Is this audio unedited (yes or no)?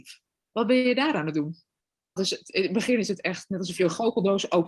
no